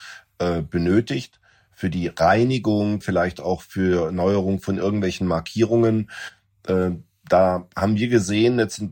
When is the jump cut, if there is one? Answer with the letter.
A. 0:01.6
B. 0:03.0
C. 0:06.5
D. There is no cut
B